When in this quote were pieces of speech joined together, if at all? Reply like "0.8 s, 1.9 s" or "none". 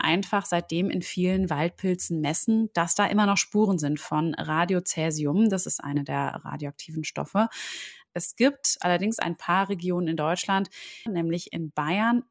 8.1 s, 11.1 s